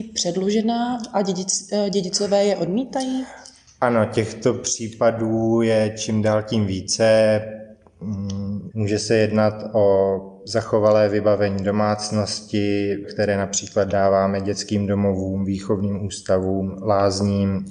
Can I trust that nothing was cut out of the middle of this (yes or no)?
no